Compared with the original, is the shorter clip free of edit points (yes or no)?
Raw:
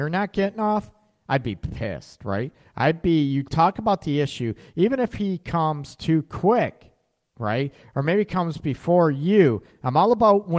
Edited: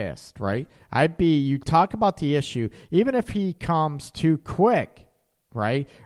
yes